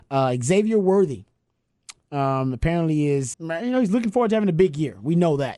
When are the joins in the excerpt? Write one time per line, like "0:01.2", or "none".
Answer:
0:03.3